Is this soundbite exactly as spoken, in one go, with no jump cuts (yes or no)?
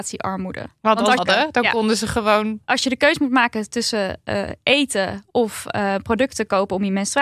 no